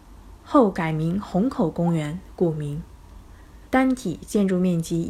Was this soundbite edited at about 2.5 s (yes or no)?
no